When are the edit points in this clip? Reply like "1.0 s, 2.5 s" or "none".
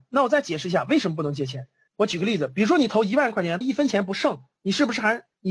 1.9 s, 3.6 s